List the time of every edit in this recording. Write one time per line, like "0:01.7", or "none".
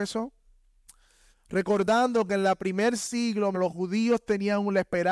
0:01.3
0:03.5